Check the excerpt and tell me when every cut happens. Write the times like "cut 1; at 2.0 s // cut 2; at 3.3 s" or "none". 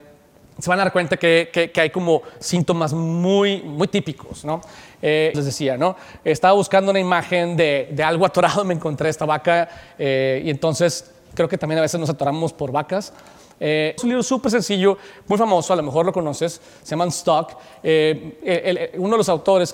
cut 1; at 5.3 s // cut 2; at 14.0 s